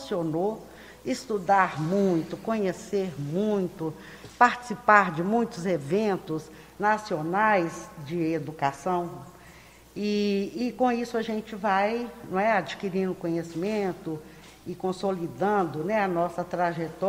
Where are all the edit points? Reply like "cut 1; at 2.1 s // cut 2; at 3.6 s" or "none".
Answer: none

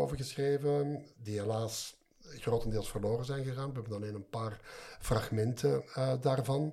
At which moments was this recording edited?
none

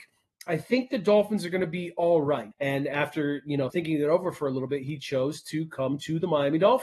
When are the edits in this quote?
cut 1; at 2.5 s // cut 2; at 3.7 s

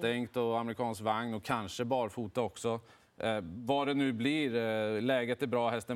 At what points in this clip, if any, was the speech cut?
none

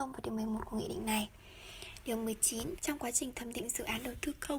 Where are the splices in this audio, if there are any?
cut 1; at 2.8 s

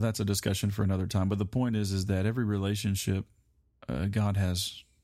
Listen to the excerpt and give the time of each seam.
none

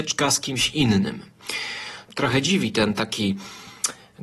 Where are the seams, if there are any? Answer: cut 1; at 2.1 s

